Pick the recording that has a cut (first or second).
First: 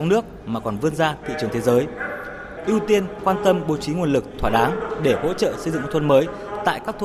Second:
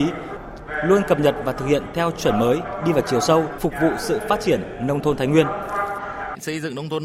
second